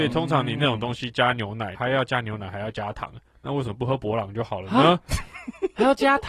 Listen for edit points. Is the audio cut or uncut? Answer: cut